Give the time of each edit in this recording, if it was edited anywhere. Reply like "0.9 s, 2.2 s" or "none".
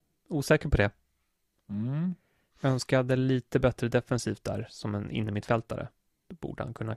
none